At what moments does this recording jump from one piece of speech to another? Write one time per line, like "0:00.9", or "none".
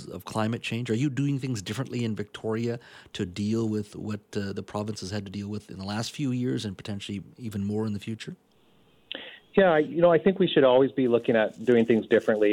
none